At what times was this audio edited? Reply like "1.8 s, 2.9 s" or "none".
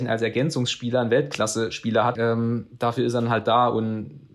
2.2 s